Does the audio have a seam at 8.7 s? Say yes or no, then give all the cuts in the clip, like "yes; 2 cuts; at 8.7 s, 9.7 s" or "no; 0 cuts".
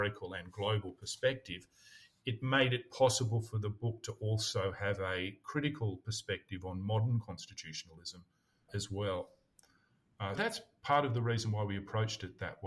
yes; 2 cuts; at 8.7 s, 10.4 s